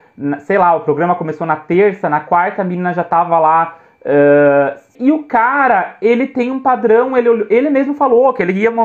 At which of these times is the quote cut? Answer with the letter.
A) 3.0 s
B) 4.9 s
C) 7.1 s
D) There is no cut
B